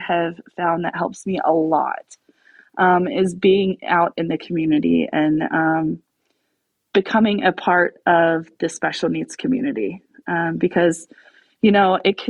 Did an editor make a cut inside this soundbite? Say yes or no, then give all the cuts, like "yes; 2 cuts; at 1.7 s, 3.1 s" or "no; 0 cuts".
no; 0 cuts